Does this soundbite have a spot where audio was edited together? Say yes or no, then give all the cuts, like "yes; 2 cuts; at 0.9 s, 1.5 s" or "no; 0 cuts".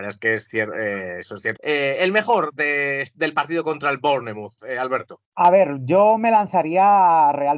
yes; 1 cut; at 1.6 s